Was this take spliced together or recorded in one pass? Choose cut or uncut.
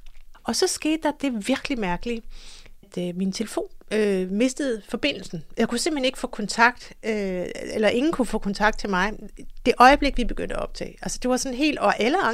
uncut